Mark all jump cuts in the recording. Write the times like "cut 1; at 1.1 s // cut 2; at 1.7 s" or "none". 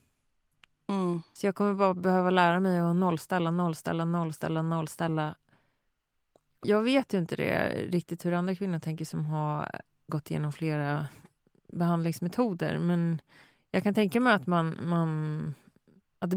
cut 1; at 6.6 s